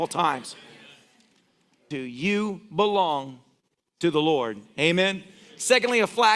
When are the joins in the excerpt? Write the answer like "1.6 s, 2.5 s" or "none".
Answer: 1.9 s